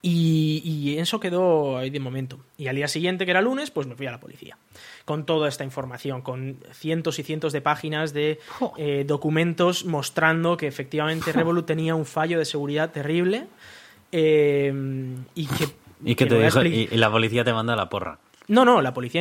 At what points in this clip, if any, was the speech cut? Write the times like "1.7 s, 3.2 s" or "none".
none